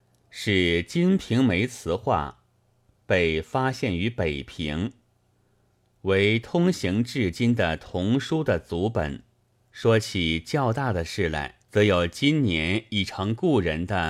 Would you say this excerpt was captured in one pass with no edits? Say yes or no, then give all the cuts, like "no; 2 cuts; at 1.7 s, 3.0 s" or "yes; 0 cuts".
no; 2 cuts; at 9.5 s, 11.6 s